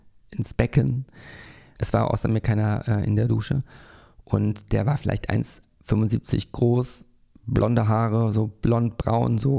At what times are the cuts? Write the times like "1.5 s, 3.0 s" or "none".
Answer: 1.8 s